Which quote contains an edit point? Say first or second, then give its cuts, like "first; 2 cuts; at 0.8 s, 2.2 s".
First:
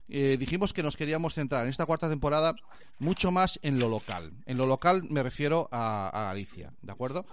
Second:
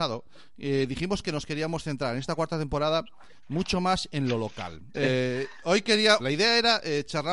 second; 2 cuts; at 4.9 s, 6.2 s